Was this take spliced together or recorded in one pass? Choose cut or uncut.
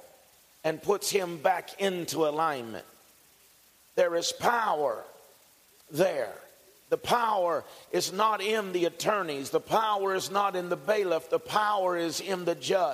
uncut